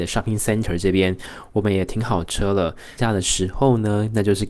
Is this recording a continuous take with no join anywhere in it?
no; 1 cut; at 3.0 s

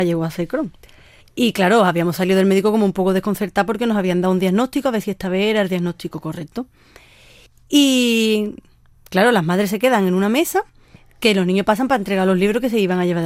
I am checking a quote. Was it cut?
no; 0 cuts

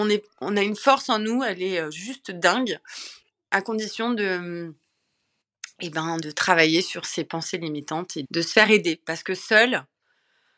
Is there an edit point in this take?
yes; 2 cuts; at 6.2 s, 8.2 s

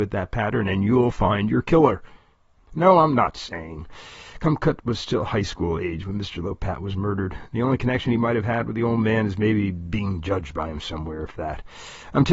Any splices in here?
yes; 1 cut; at 2.6 s

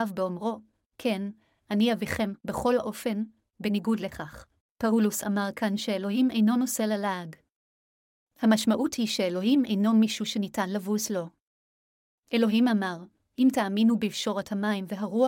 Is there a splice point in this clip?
yes; 1 cut; at 4.6 s

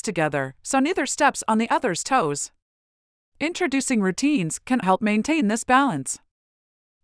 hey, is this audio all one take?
no; 1 cut; at 4.8 s

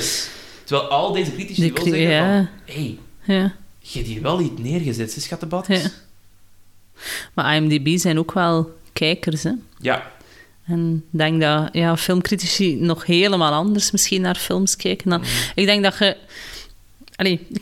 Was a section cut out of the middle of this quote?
no; 0 cuts

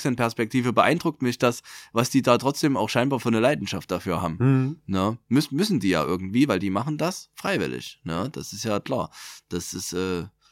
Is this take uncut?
yes; 0 cuts

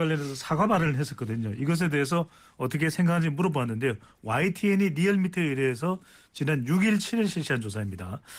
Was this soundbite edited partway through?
no; 0 cuts

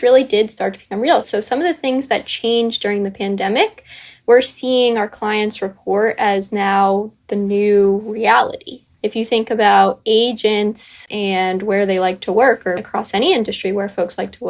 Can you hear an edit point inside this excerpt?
yes; 2 cuts; at 1.2 s, 12.8 s

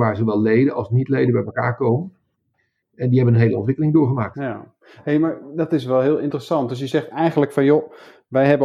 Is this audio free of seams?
yes; 0 cuts

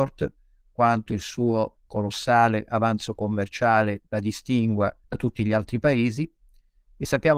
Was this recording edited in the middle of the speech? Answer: yes; 1 cut; at 5.0 s

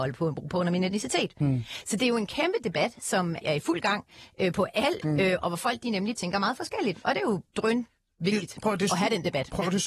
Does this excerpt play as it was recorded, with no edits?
no; 3 cuts; at 3.4 s, 5.0 s, 7.5 s

